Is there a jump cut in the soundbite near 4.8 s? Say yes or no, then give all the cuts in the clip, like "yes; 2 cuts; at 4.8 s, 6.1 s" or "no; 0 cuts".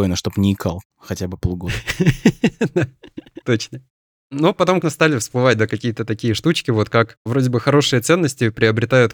yes; 1 cut; at 4.8 s